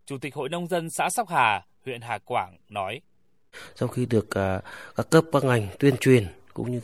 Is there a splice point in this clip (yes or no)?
no